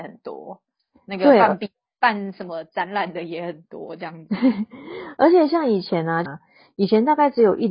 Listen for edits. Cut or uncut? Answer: cut